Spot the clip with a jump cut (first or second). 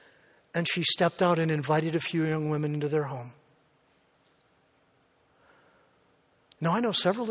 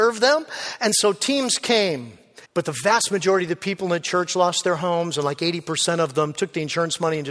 second